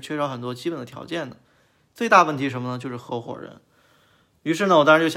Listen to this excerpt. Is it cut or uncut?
uncut